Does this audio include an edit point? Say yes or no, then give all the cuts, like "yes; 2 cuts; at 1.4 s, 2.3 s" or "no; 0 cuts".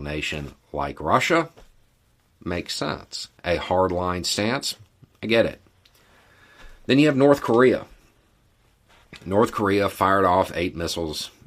yes; 1 cut; at 3.4 s